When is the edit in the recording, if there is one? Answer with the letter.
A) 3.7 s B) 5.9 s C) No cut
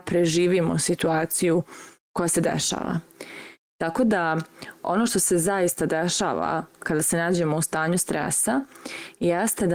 A